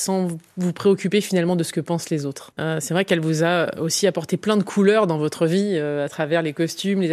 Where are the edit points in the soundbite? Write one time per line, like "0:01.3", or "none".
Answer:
0:02.6

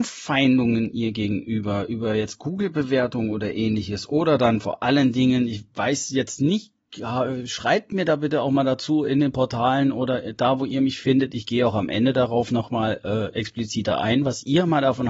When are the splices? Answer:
none

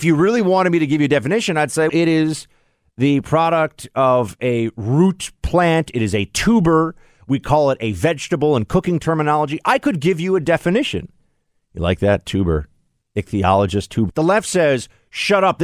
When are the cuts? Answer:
0:01.9
0:13.0
0:14.1

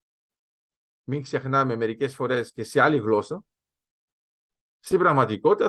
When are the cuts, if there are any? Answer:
0:04.7

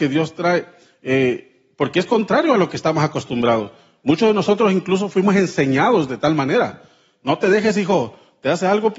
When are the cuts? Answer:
none

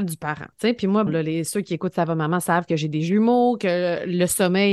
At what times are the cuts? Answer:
0:01.1

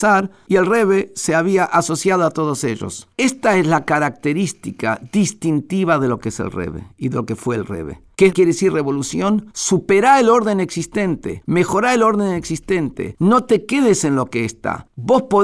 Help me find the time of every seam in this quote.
none

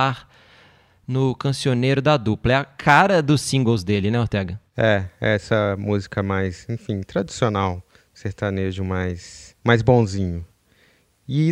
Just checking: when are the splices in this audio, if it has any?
0:09.6

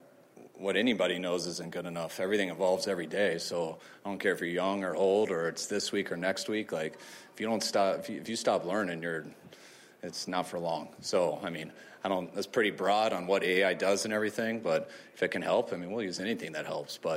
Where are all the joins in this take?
none

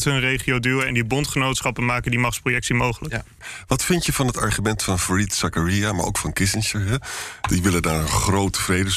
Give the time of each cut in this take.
none

